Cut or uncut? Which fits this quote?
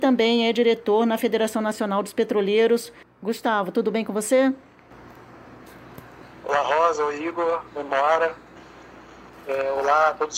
uncut